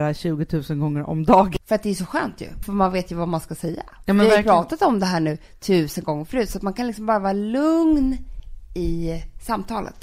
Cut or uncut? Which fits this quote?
cut